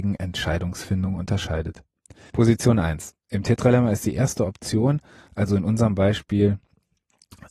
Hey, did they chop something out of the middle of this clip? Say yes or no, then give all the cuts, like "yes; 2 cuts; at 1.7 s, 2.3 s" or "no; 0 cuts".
yes; 1 cut; at 2.3 s